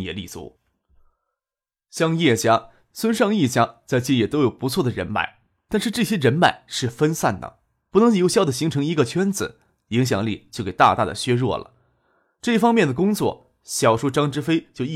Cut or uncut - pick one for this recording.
uncut